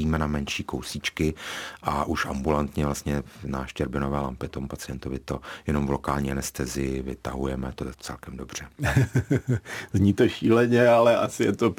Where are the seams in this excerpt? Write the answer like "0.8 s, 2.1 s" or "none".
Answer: 7.9 s